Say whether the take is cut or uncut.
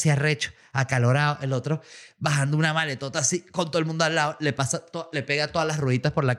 uncut